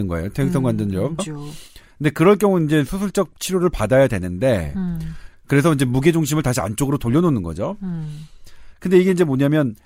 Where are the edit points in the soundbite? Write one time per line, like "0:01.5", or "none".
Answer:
0:01.2